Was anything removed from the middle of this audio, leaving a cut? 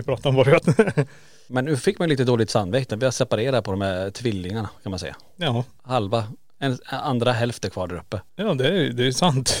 no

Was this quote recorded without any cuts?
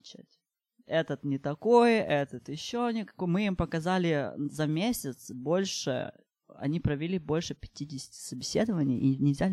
yes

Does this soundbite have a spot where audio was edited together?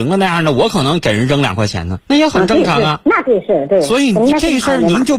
yes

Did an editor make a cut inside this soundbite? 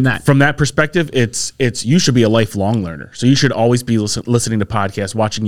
no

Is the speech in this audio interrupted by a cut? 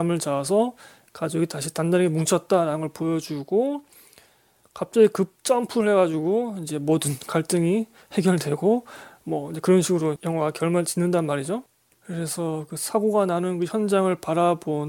yes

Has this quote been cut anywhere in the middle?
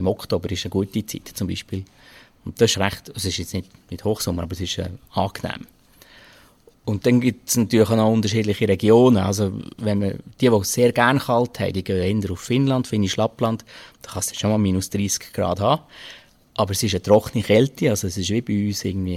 yes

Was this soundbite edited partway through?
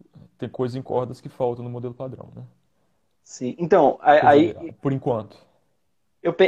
no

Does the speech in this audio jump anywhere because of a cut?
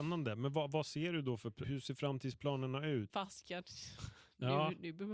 yes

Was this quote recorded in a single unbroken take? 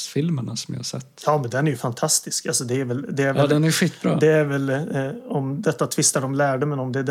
yes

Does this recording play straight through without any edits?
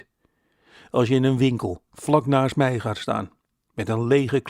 no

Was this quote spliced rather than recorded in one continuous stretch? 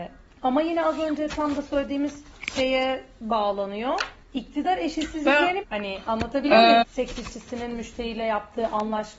yes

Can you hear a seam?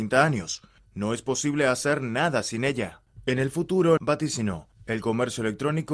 yes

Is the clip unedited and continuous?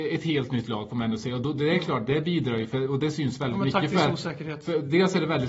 yes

